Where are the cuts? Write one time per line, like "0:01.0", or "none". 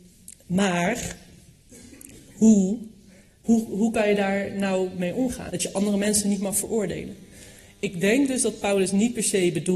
0:03.4
0:05.5